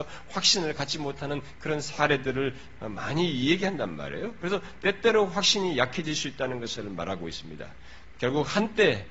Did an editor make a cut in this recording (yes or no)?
yes